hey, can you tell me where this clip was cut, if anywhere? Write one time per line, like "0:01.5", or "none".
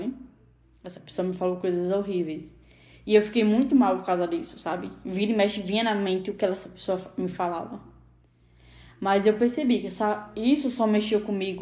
none